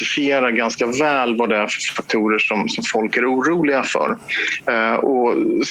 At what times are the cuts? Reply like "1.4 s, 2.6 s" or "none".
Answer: none